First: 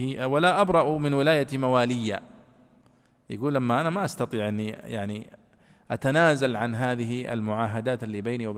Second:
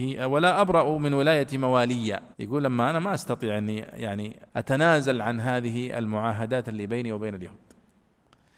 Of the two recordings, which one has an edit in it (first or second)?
second